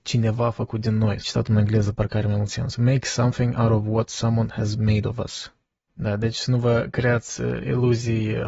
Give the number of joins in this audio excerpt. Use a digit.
2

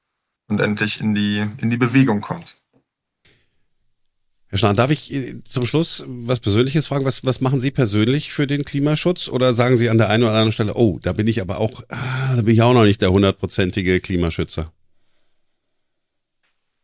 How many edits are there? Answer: 0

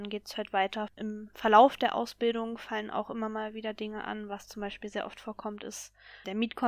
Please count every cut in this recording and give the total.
0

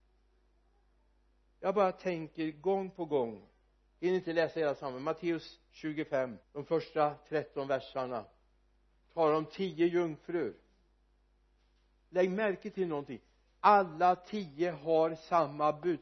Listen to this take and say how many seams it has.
1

